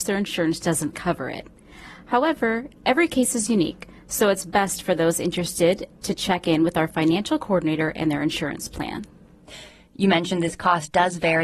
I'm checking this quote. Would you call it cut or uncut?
uncut